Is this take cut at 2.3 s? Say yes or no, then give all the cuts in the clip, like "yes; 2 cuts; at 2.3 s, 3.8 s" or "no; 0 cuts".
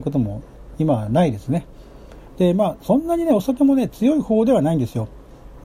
yes; 1 cut; at 2.3 s